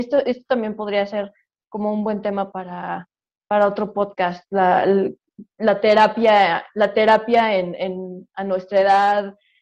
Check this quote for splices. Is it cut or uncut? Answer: cut